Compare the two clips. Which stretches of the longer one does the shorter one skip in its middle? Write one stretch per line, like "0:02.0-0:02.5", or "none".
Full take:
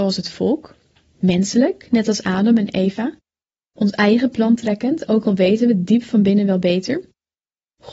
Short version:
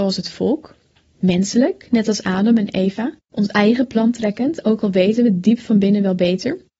0:03.2-0:03.7